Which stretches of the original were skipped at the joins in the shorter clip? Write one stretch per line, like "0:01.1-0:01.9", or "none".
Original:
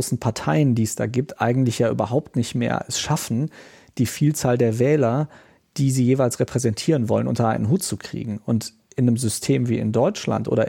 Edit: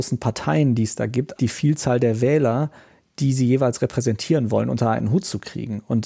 0:01.4-0:03.9